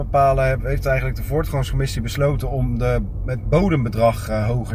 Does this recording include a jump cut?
no; 0 cuts

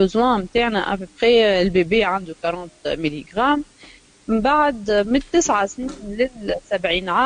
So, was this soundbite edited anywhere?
no; 0 cuts

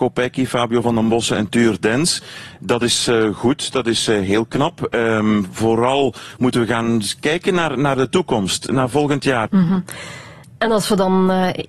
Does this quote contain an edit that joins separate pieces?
yes; 1 cut; at 9.5 s

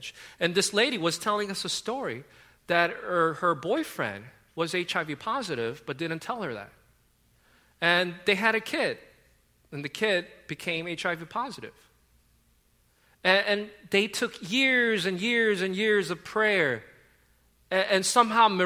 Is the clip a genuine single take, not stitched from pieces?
yes; 0 cuts

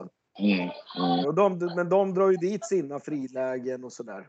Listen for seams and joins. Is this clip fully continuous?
no; 1 cut; at 1.2 s

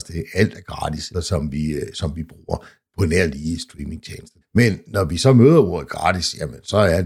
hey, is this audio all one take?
no; 2 cuts; at 1.1 s, 4.4 s

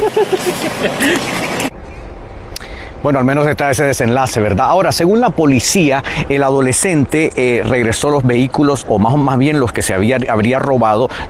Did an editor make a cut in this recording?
no; 0 cuts

